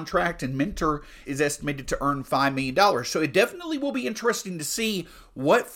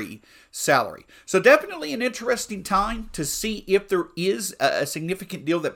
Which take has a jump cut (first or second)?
first